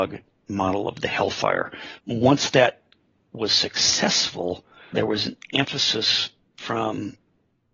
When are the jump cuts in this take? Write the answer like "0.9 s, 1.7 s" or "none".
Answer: 2.0 s, 4.9 s